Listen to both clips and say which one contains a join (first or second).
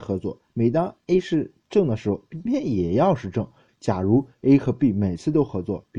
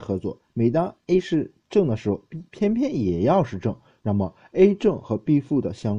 first